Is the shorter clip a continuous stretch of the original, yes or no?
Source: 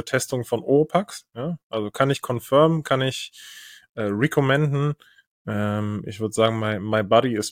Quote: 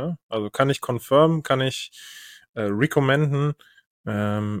yes